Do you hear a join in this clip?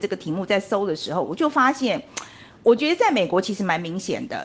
no; 0 cuts

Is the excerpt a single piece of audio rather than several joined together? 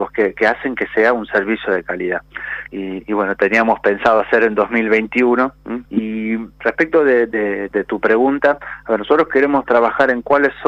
no; 2 cuts; at 2.7 s, 5.8 s

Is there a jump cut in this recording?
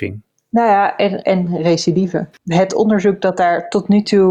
yes; 2 cuts; at 1.2 s, 2.3 s

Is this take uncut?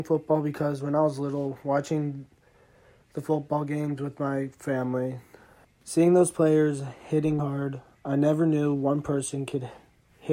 no; 2 cuts; at 5.6 s, 7.4 s

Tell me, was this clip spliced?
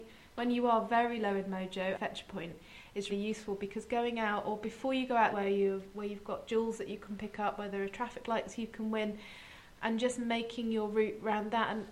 yes; 3 cuts; at 1.9 s, 3.1 s, 5.3 s

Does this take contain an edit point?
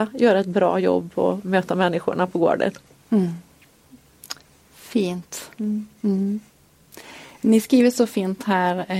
no; 0 cuts

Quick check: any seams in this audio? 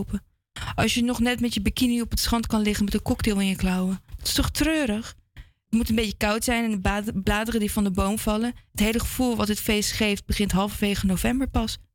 no; 0 cuts

